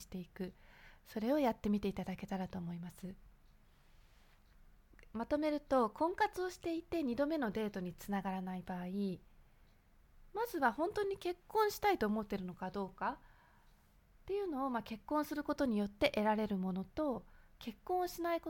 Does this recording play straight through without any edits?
yes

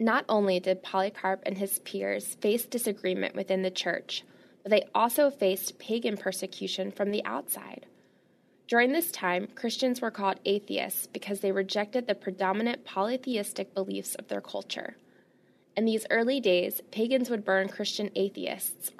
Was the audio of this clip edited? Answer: no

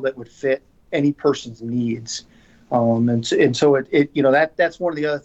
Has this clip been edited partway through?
no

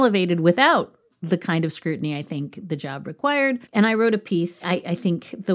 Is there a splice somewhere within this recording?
no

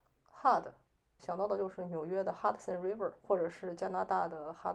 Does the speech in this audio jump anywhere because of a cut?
yes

